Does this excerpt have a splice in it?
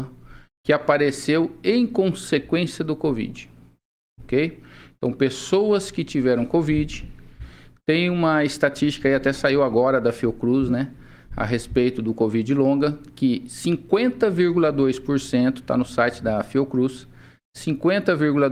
no; 0 cuts

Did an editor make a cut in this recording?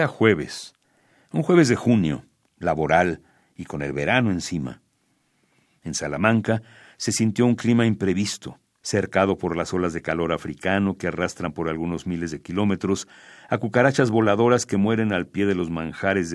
yes; 1 cut; at 8.8 s

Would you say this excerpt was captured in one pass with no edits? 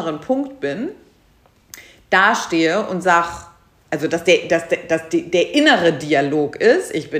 yes; 0 cuts

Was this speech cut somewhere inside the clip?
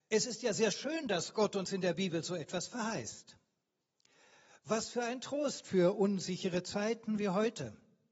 no; 0 cuts

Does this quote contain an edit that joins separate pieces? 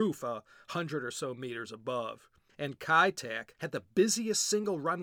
yes; 2 cuts; at 2.5 s, 3.5 s

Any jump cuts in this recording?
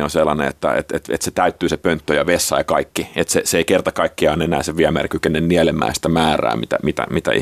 no; 0 cuts

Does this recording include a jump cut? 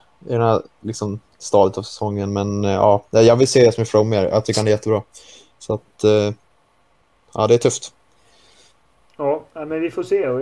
no; 0 cuts

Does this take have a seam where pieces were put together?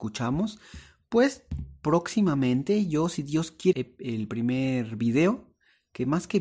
yes; 1 cut; at 3.7 s

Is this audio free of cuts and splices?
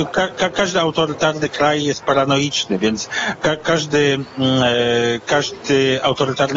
yes; 0 cuts

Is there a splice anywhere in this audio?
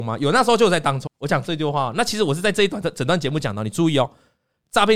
yes; 1 cut; at 1.1 s

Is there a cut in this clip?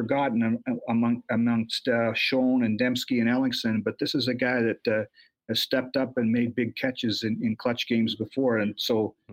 no; 0 cuts

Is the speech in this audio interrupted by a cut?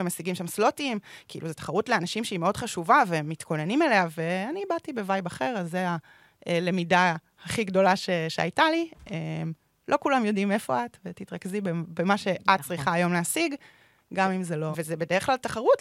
yes; 1 cut; at 14.7 s

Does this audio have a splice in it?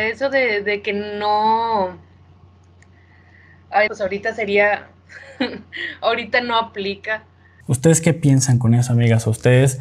yes; 2 cuts; at 3.9 s, 7.6 s

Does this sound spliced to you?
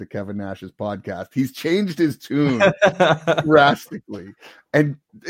no; 0 cuts

